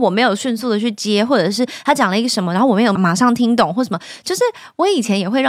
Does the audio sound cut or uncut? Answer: cut